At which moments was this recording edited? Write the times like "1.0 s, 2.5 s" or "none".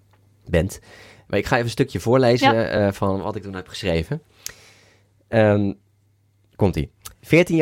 none